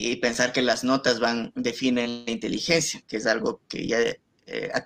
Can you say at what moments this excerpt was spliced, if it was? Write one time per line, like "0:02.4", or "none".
none